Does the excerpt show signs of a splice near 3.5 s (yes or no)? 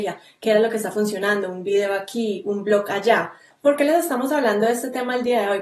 yes